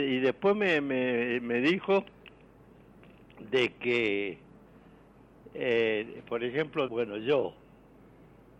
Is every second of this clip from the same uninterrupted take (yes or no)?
no